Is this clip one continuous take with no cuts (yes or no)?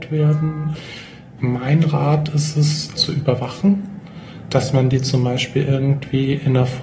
no